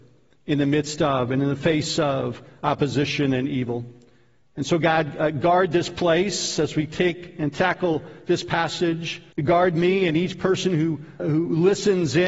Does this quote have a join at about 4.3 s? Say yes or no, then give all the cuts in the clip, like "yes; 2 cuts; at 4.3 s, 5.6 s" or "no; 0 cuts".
no; 2 cuts; at 9.3 s, 11.2 s